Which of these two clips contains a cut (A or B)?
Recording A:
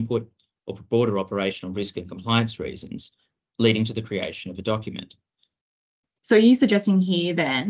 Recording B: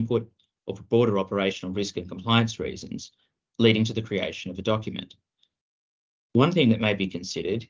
A